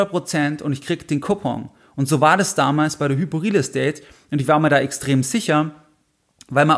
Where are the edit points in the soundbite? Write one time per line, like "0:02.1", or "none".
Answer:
none